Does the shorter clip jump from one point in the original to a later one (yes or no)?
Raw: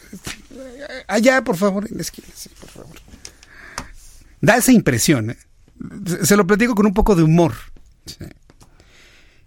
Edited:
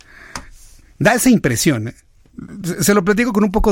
no